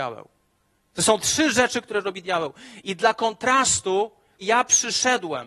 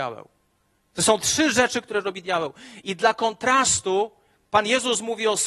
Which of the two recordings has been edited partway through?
first; 1 cut; at 4.4 s

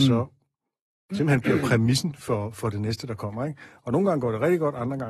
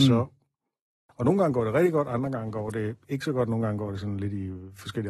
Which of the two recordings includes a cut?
second; 1 cut; at 1.1 s

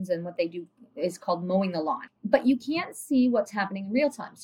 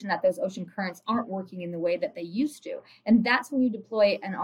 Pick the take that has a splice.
first; 1 cut; at 2.1 s

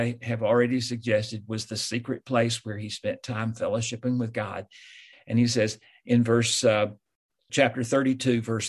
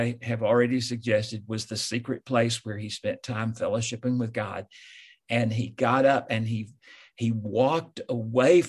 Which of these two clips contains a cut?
first; 1 cut; at 5.1 s

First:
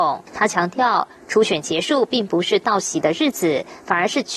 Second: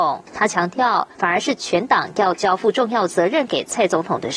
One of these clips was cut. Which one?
second; 1 cut; at 1.1 s

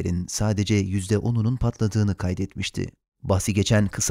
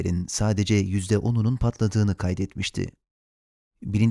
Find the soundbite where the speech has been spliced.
first; 1 cut; at 3.1 s

